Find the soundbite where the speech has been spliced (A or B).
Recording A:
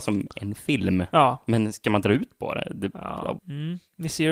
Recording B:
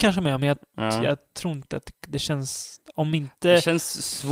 A